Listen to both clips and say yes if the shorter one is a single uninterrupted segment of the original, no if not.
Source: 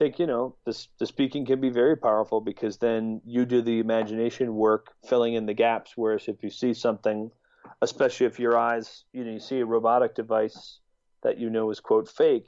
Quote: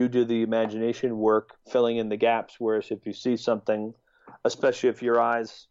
yes